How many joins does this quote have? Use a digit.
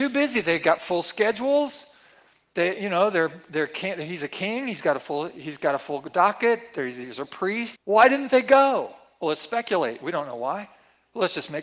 1